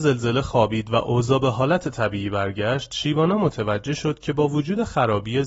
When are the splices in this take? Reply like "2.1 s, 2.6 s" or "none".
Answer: none